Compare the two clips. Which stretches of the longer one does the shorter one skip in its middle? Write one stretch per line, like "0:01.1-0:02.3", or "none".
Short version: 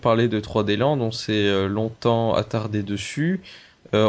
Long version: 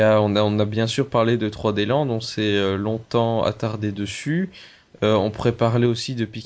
none